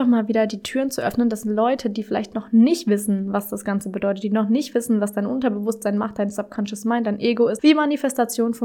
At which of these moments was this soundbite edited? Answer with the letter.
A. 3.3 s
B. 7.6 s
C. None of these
B